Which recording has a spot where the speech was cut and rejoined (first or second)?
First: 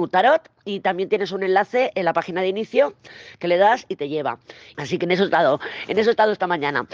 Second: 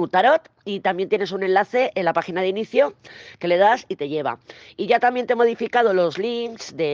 first